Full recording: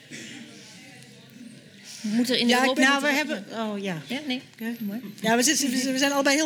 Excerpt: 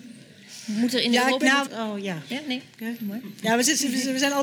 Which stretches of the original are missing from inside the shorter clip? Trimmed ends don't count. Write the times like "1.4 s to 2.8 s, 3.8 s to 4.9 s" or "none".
3.0 s to 3.5 s